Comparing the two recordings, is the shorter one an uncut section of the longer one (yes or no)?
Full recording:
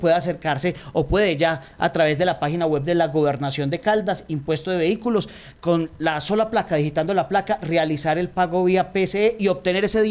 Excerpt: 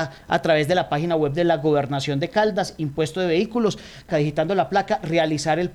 no